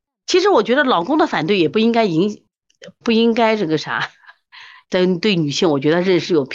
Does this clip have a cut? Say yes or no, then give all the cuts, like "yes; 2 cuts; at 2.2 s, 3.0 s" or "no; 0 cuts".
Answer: yes; 2 cuts; at 3.0 s, 4.8 s